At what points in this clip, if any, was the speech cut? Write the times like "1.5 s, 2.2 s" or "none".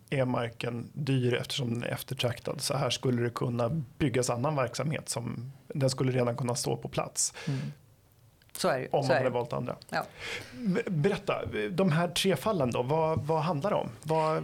none